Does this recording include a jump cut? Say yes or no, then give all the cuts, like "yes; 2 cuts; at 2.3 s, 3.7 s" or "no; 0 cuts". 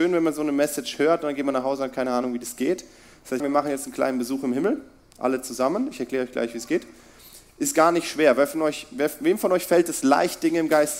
yes; 1 cut; at 3.4 s